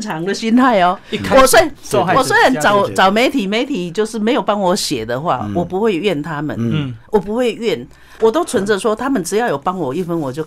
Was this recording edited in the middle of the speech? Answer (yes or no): no